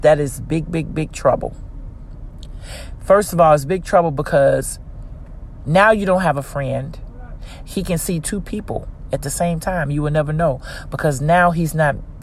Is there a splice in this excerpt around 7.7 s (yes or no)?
yes